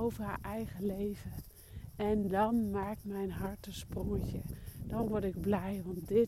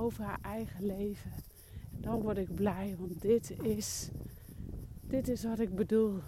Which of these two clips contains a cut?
second; 1 cut; at 1.9 s

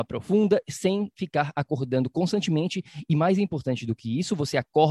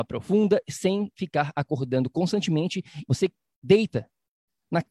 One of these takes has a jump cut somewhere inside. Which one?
second; 1 cut; at 3.0 s

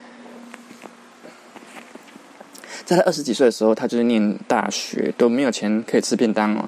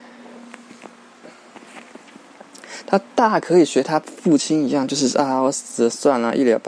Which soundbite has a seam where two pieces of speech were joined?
second; 1 cut; at 2.8 s

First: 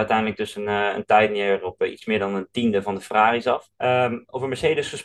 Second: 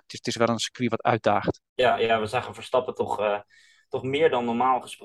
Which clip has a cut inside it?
first; 1 cut; at 3.7 s

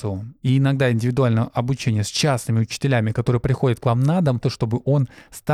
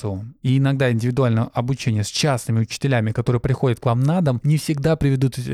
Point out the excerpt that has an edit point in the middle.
first; 1 cut; at 4.4 s

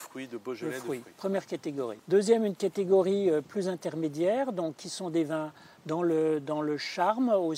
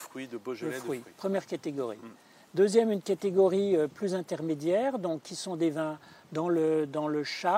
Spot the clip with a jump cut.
first; 1 cut; at 2.0 s

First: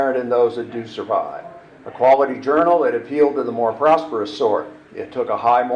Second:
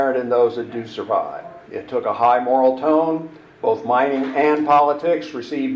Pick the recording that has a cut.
second; 1 cut; at 1.6 s

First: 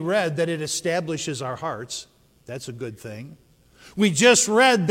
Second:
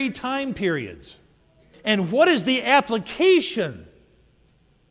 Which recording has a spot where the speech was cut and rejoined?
second; 1 cut; at 1.7 s

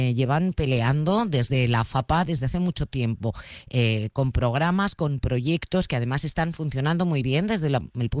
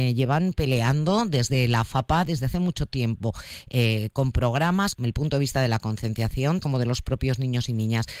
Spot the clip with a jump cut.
second; 2 cuts; at 4.9 s, 6.6 s

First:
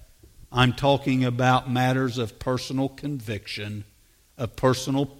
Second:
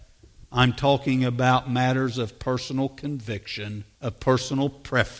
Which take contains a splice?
second; 1 cut; at 3.9 s

